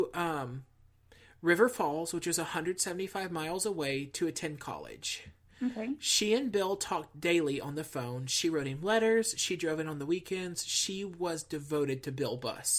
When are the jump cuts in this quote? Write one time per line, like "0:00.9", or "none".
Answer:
none